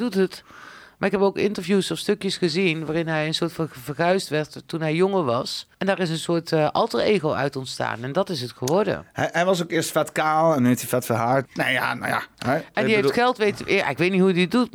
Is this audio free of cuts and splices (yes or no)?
no